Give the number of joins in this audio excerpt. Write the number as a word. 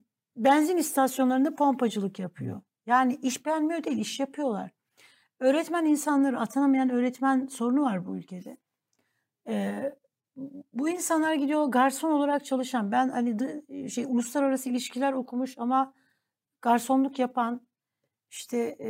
zero